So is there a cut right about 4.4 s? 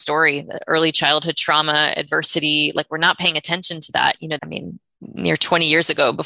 yes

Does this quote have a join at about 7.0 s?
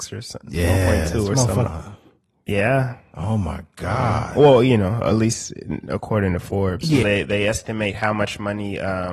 yes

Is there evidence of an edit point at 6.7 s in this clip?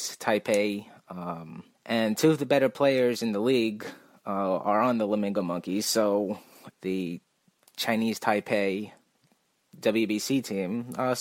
yes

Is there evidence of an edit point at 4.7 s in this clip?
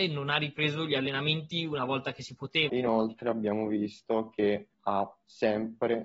yes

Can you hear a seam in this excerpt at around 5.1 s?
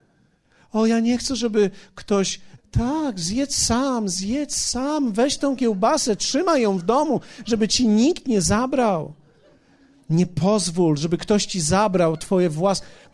no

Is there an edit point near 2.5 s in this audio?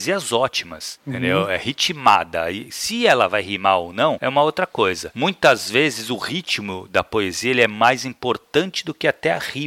no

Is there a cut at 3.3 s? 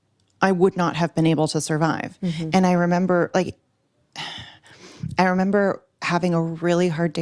no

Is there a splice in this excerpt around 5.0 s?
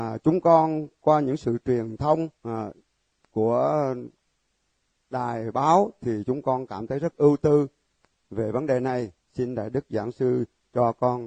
no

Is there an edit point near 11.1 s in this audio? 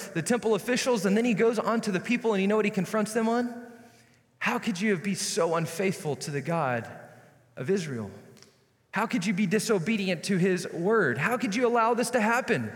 no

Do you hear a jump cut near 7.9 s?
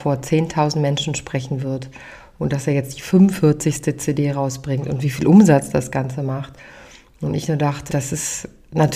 yes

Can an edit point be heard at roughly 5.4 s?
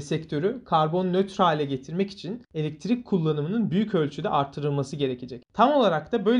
yes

